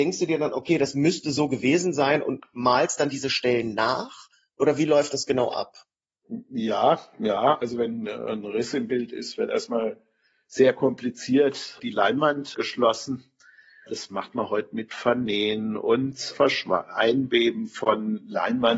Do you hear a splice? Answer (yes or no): no